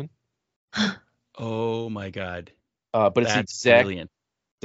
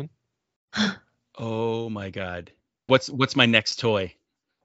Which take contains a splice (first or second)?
second